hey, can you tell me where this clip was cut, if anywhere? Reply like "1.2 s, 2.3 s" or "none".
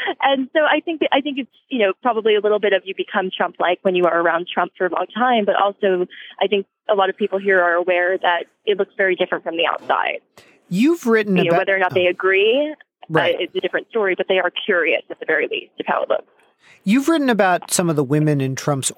4.9 s